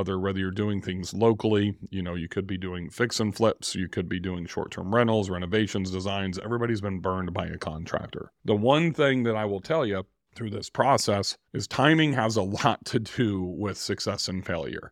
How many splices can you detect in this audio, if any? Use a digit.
1